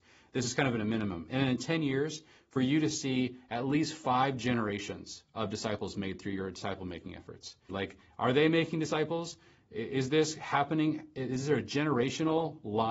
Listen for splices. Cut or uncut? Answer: cut